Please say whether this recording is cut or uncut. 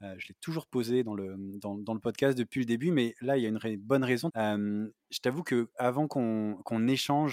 cut